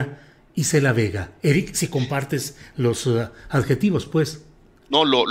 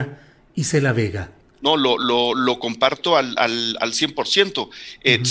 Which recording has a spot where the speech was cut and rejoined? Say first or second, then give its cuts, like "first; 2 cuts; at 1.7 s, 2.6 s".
second; 1 cut; at 1.4 s